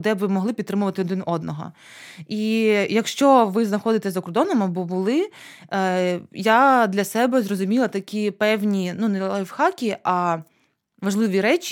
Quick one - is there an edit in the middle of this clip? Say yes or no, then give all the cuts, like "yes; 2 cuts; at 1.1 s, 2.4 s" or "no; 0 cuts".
no; 0 cuts